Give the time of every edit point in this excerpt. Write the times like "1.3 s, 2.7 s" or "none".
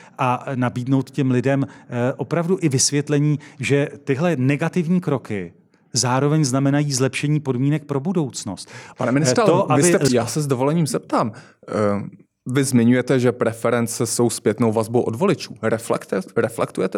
8.9 s, 10.1 s